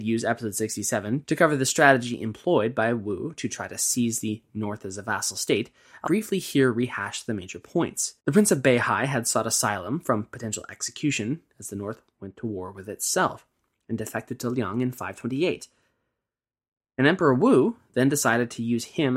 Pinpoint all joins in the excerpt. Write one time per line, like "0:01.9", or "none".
0:06.1
0:08.2